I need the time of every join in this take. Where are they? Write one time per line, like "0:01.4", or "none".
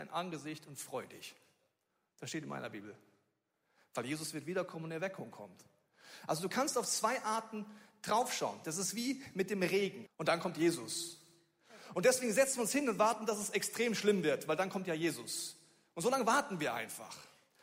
0:10.1
0:11.9